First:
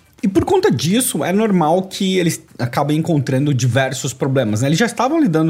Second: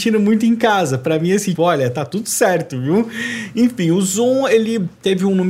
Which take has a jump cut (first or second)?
second